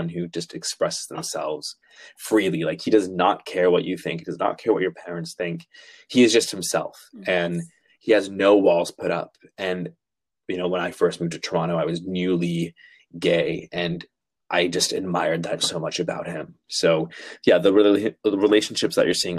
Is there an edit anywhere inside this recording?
yes; 1 cut; at 15.6 s

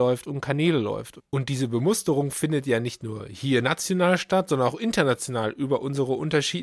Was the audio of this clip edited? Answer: no; 0 cuts

